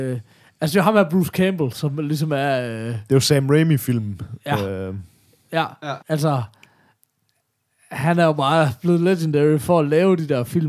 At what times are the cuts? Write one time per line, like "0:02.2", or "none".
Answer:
0:06.0